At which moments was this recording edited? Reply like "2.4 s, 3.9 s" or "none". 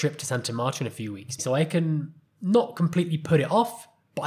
1.4 s

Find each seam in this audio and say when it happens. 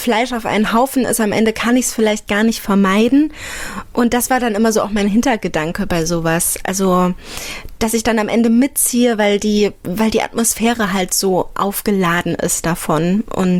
none

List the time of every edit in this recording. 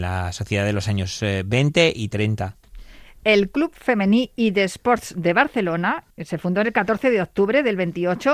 6.1 s

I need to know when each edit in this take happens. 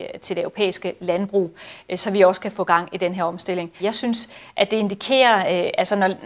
3.8 s

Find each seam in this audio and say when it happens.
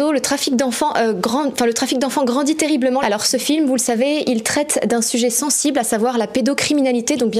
3.0 s

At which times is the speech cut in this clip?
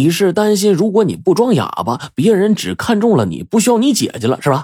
none

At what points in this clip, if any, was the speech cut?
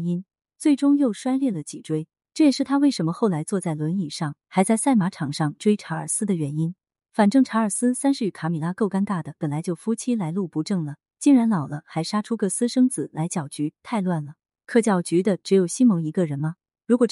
7.0 s

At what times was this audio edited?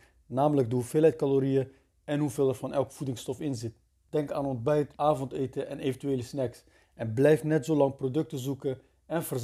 4.9 s

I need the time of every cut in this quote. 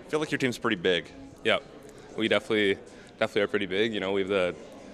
none

